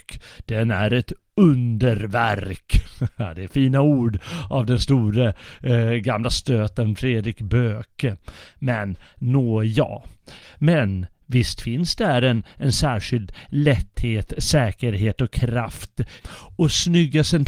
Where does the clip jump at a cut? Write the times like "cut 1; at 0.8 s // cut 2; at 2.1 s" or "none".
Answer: cut 1; at 10.4 s // cut 2; at 16.2 s